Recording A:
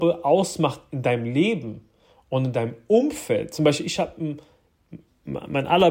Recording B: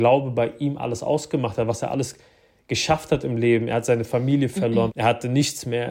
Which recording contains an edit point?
B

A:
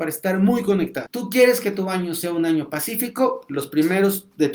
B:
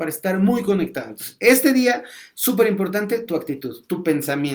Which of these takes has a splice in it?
A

